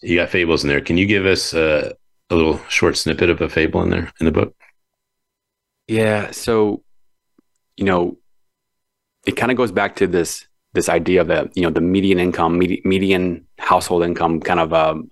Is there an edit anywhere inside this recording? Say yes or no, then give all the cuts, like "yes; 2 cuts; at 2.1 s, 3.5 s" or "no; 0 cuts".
no; 0 cuts